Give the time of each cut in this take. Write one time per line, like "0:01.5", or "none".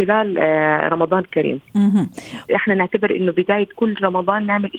0:02.5